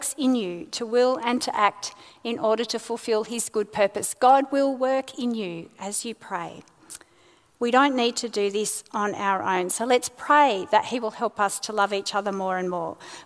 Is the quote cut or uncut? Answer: uncut